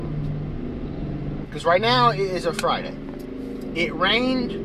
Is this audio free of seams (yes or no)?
no